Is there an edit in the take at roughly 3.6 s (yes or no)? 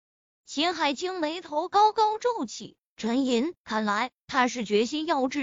yes